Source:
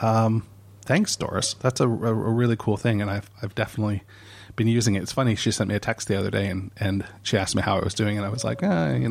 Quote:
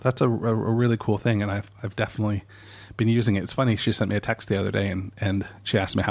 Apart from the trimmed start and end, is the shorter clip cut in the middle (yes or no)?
no